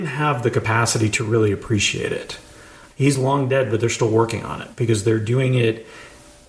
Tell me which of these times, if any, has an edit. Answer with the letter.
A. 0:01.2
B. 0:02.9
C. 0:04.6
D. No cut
B